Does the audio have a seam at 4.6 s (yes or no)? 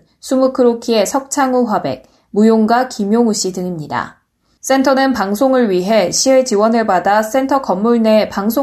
yes